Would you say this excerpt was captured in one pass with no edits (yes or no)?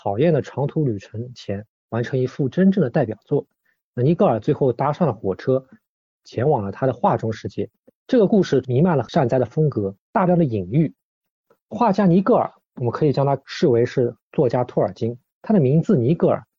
yes